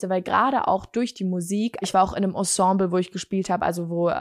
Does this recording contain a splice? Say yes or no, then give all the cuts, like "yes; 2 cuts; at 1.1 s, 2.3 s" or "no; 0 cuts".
yes; 1 cut; at 1.8 s